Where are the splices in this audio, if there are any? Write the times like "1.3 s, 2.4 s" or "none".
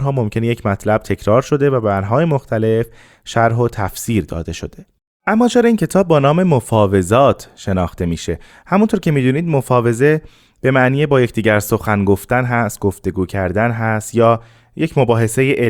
none

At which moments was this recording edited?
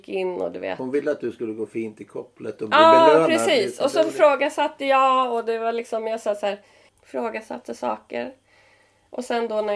6.9 s

